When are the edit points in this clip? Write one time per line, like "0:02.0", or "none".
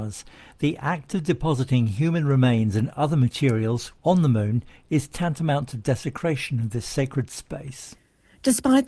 0:04.0